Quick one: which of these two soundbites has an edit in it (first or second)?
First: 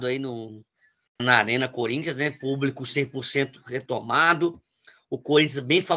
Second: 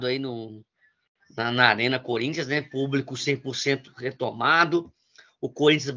first